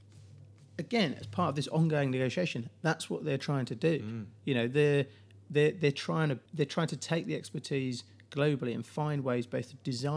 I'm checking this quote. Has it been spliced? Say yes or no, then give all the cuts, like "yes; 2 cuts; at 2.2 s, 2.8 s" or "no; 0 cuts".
yes; 1 cut; at 6.5 s